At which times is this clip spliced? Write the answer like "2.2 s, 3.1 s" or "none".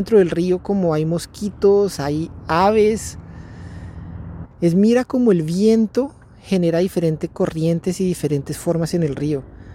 2.0 s, 4.5 s